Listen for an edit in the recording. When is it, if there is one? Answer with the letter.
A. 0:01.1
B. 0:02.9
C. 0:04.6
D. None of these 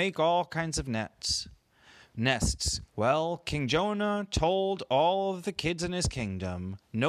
B